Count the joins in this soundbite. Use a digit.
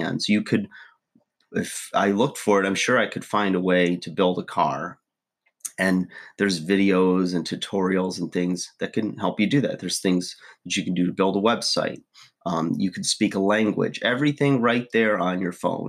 0